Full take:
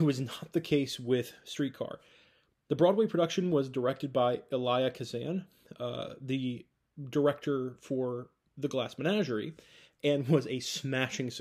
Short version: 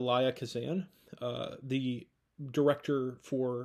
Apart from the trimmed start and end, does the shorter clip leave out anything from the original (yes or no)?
no